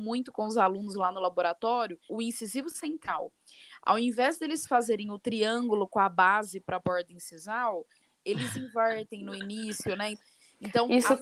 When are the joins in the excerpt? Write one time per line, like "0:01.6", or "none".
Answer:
0:02.1
0:10.1

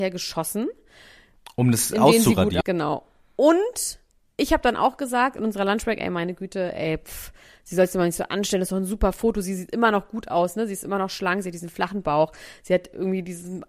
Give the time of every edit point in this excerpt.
0:02.6

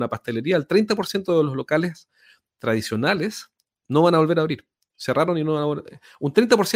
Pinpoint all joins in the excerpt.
none

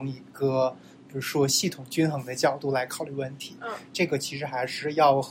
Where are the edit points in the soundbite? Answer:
0:03.9

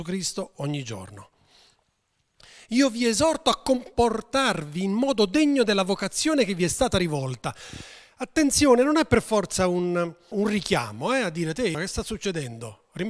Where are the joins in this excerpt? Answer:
0:10.3
0:11.7

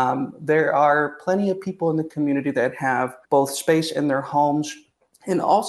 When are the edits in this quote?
0:03.2

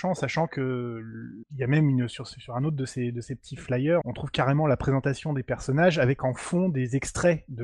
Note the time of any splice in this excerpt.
0:04.0

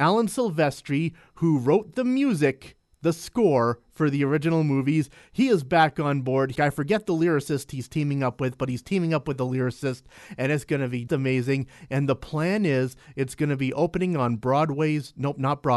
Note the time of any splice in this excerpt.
0:06.6
0:11.1

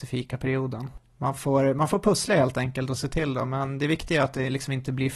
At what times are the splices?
none

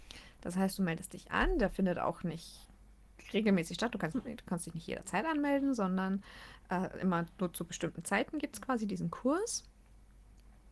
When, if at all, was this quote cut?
0:04.1

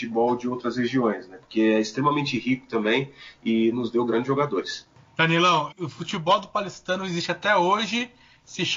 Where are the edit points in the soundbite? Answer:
0:05.7

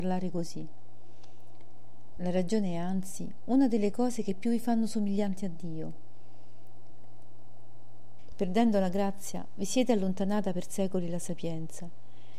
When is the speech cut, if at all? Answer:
0:02.2
0:08.3

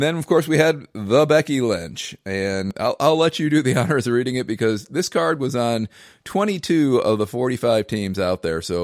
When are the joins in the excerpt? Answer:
none

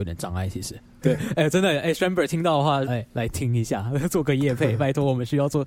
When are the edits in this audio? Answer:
0:01.0
0:02.9

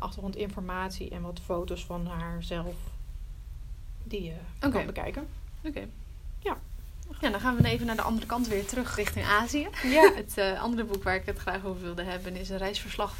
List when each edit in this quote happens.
0:09.0
0:10.1

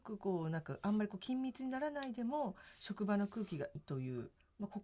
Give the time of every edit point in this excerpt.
0:03.8

